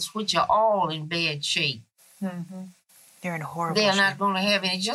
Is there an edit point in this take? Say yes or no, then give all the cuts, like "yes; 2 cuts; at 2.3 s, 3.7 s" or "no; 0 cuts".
no; 0 cuts